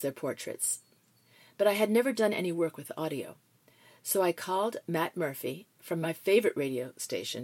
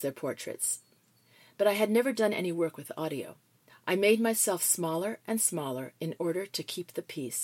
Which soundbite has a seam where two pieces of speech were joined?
second; 1 cut; at 3.7 s

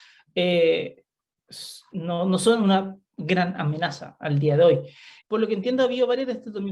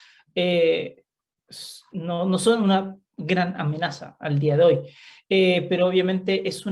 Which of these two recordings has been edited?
first; 1 cut; at 5.2 s

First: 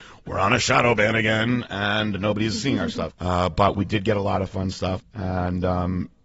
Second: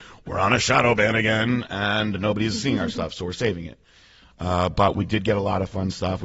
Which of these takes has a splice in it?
first; 2 cuts; at 3.1 s, 5.0 s

